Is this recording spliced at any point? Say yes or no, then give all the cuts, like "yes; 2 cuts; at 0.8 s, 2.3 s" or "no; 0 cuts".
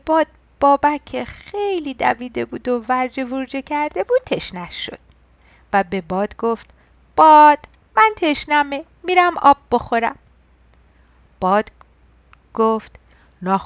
no; 0 cuts